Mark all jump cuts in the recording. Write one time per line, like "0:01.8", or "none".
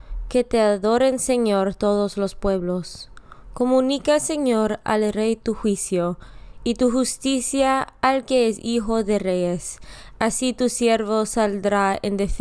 none